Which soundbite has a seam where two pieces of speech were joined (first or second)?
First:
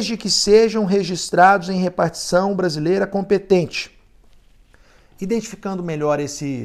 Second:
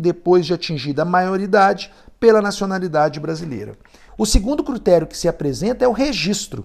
second